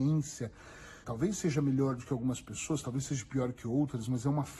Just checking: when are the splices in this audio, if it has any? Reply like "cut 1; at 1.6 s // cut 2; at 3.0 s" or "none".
cut 1; at 1.0 s